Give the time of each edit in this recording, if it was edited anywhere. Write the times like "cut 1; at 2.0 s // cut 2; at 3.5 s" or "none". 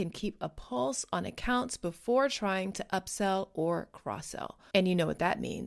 cut 1; at 4.7 s